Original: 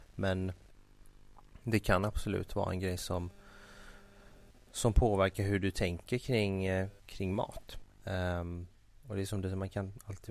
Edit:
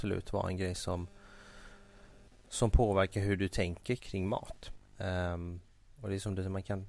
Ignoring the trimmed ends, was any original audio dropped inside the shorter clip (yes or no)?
yes